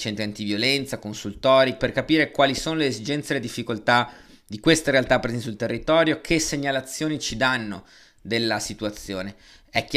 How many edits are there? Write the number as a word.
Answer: one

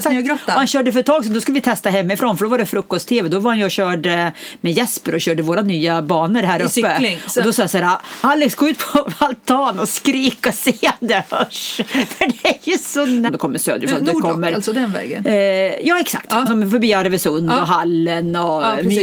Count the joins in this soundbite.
two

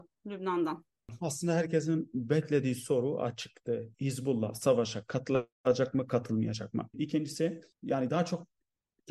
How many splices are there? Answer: two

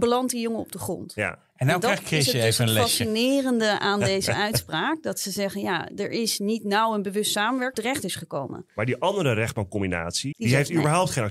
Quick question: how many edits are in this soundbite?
two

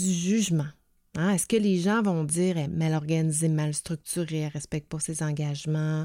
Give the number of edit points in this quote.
one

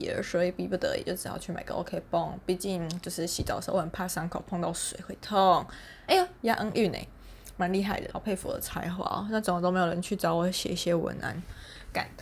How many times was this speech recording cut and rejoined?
one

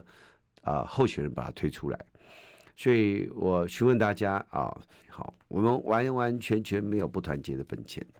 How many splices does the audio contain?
one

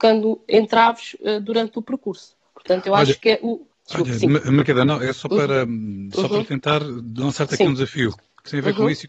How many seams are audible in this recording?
one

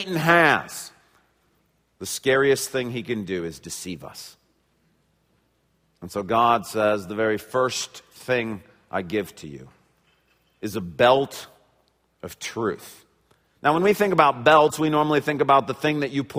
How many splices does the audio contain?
zero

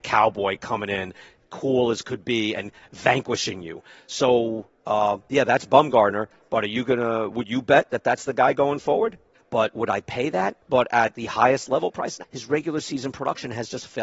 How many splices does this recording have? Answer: three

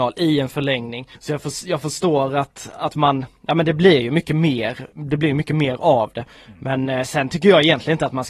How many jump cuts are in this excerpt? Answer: one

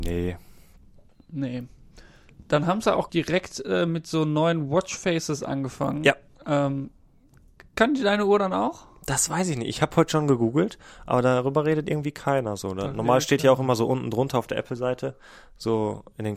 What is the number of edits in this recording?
one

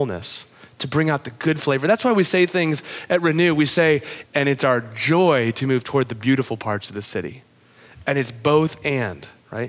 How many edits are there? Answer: one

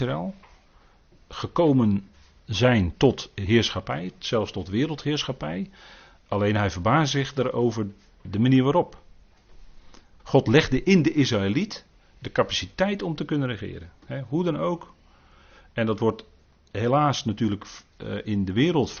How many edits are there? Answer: one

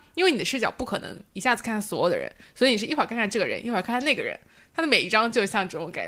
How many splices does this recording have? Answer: zero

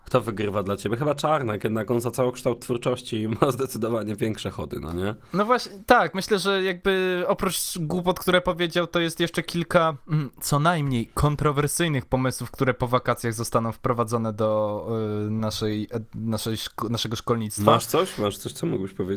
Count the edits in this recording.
zero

